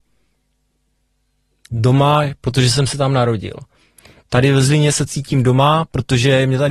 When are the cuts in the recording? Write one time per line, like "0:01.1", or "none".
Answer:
none